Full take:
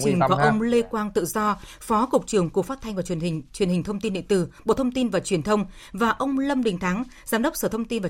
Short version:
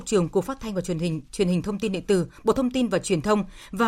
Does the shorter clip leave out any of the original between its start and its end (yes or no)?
no